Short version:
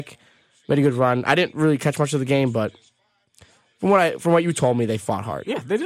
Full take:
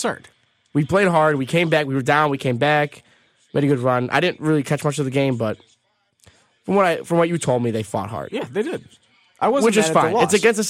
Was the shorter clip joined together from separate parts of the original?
no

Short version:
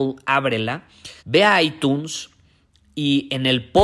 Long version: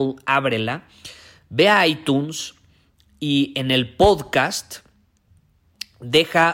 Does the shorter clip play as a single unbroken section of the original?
no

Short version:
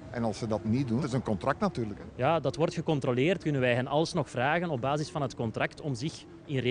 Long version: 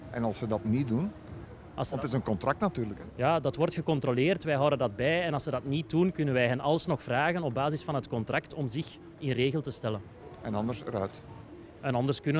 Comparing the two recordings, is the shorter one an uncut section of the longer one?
no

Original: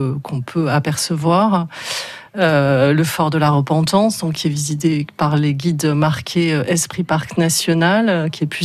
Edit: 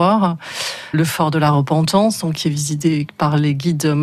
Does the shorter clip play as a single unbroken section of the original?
no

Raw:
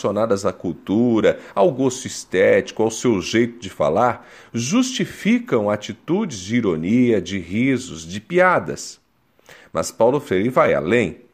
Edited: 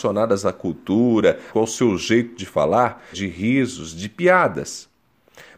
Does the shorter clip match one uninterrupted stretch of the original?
no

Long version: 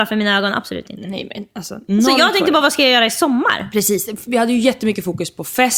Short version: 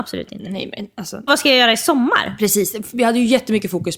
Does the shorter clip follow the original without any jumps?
no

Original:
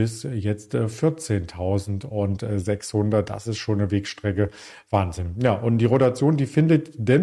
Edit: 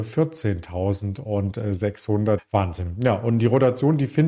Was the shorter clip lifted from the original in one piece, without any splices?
no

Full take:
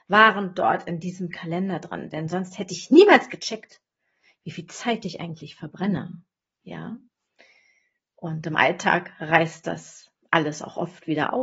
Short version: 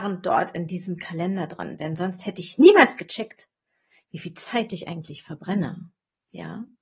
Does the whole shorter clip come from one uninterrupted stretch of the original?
yes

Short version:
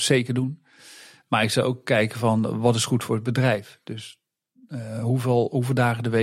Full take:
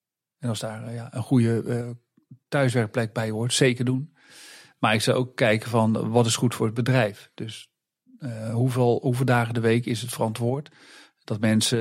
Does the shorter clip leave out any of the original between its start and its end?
no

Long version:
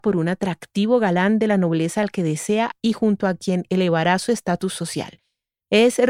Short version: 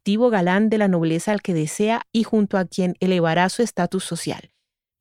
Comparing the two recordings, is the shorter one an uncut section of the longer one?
yes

